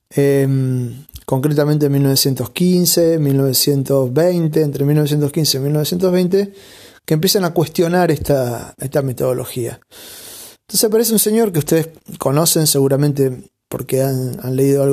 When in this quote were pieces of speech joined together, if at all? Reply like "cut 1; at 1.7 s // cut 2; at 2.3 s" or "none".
cut 1; at 8.8 s